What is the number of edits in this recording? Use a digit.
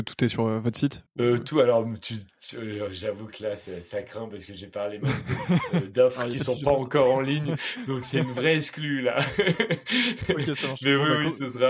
1